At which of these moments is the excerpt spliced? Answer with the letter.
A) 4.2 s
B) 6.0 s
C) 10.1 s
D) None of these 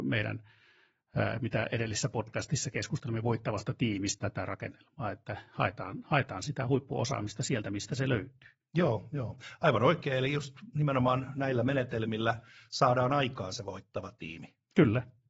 A